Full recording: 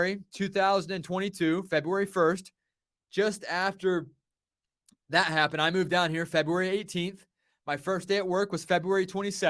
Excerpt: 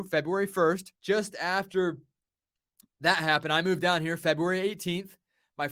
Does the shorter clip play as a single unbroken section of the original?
no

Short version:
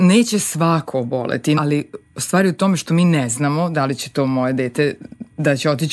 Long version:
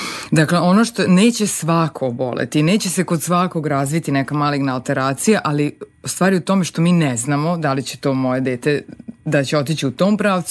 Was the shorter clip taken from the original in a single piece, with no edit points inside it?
no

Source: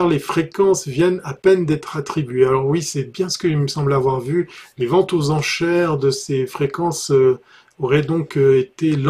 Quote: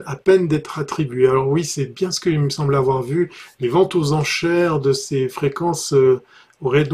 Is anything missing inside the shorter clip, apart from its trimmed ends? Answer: no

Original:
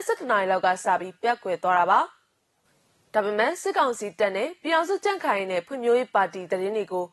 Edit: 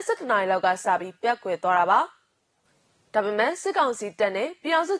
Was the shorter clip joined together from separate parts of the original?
no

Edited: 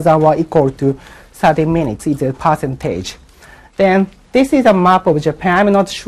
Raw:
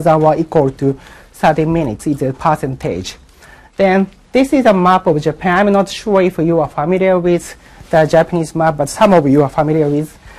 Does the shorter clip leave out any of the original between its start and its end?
no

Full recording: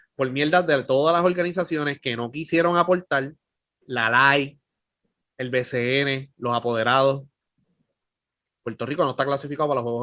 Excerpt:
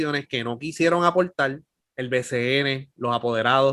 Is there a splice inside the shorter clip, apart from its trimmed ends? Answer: yes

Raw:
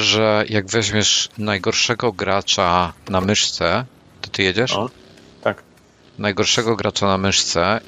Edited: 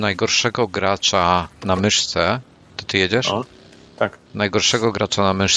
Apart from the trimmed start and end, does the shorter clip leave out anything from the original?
yes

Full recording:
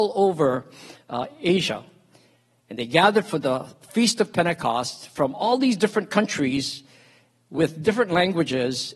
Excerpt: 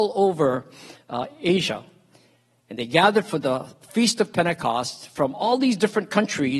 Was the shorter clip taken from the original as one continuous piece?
yes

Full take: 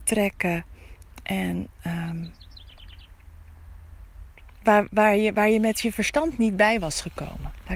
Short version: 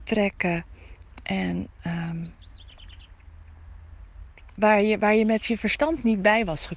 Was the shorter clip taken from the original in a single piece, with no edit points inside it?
no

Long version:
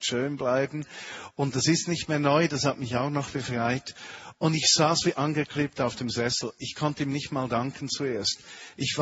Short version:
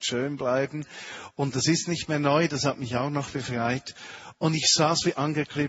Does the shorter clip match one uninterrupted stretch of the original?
yes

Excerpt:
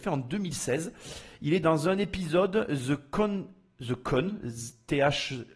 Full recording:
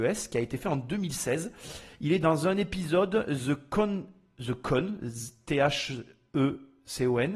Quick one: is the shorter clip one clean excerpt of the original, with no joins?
yes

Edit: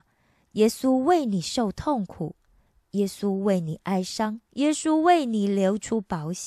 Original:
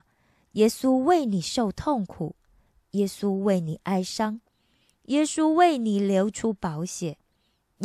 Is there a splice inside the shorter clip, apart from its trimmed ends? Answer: yes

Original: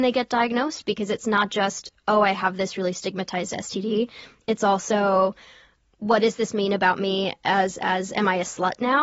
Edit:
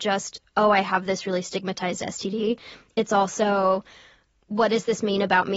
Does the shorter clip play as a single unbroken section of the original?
yes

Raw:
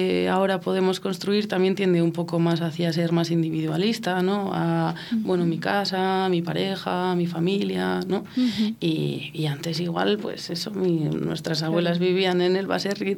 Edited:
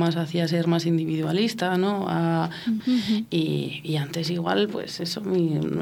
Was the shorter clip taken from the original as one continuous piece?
no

